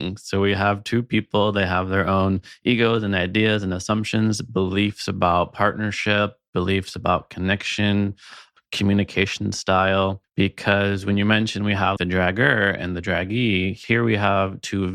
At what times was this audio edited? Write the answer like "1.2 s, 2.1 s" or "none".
10.2 s, 12.0 s